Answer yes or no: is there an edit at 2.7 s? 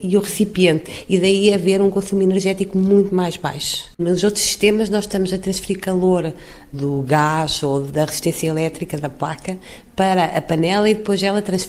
no